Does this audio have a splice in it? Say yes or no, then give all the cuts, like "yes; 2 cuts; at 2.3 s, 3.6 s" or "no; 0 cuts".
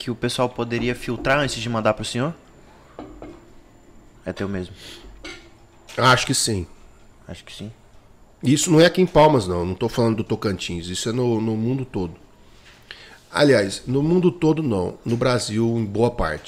yes; 1 cut; at 4.2 s